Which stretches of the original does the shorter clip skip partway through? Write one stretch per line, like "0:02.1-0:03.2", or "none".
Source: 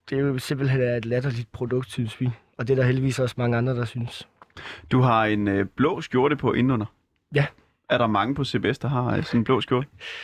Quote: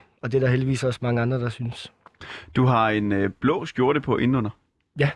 none